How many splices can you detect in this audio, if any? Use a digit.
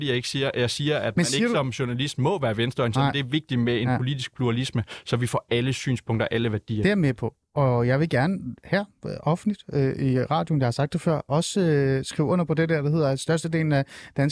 0